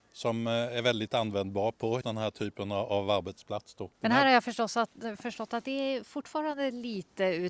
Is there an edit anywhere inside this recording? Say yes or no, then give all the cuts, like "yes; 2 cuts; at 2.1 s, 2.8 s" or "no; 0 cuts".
yes; 2 cuts; at 2.0 s, 3.9 s